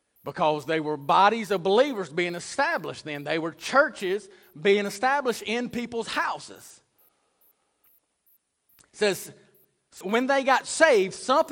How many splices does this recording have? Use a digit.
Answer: 1